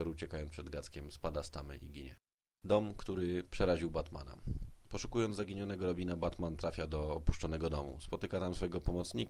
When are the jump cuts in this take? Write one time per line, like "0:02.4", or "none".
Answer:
none